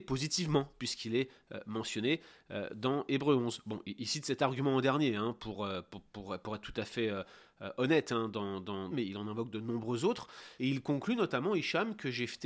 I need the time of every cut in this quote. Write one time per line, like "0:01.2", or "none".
0:08.9
0:10.6

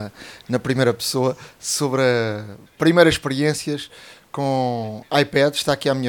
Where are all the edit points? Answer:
0:02.7

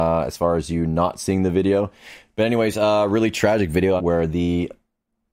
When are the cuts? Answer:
0:04.0

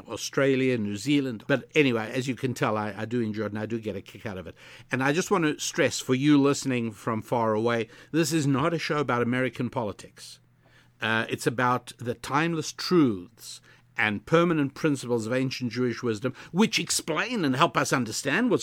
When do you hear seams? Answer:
0:01.4

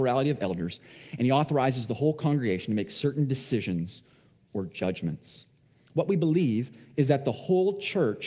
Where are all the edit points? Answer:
none

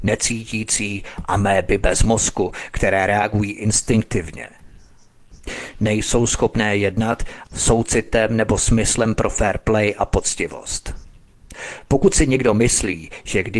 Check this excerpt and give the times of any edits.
0:07.4

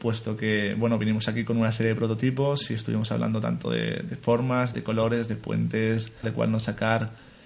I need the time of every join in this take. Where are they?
0:06.2

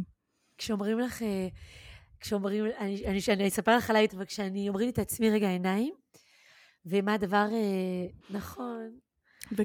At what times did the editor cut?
0:04.1
0:08.2

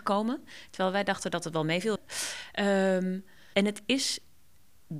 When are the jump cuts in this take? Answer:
0:02.0

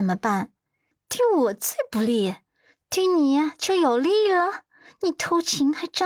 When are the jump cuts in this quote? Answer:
0:00.9

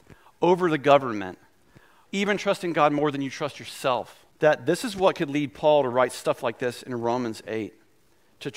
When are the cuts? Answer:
0:02.1
0:04.3

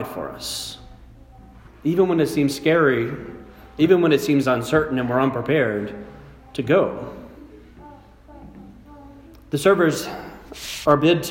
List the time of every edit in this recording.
0:01.7

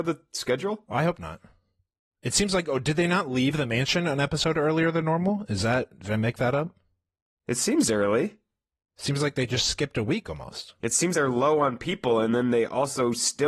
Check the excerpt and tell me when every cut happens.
0:11.1

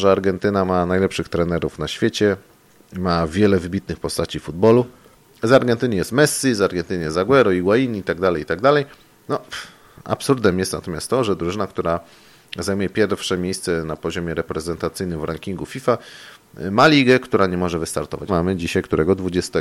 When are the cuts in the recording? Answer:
0:09.2
0:18.3

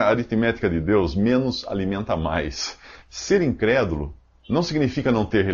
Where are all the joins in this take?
0:03.0

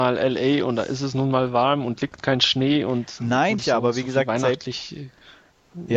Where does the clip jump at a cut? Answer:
0:03.6

